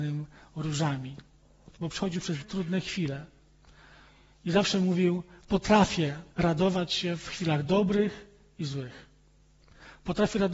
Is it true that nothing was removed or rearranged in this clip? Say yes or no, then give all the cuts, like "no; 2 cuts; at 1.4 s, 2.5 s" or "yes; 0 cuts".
no; 2 cuts; at 2.4 s, 6.3 s